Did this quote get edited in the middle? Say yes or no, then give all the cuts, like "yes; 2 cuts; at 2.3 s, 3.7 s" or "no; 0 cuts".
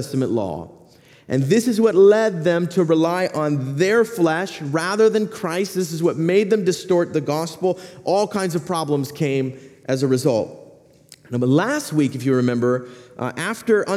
no; 0 cuts